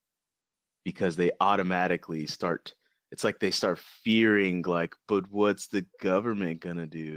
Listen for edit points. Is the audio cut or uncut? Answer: uncut